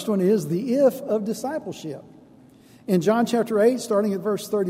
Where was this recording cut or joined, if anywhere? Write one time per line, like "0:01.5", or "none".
none